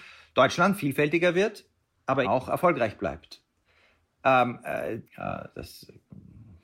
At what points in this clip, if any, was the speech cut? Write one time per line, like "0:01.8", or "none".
0:02.2
0:05.0